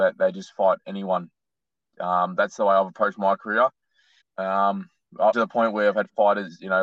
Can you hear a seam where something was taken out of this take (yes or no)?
yes